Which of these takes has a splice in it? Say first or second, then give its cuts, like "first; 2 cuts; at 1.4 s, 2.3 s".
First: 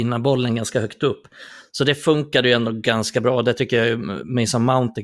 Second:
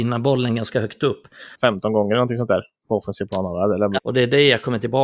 second; 2 cuts; at 1.5 s, 4.0 s